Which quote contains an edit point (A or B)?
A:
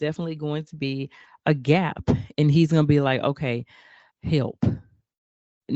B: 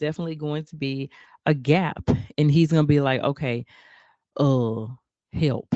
A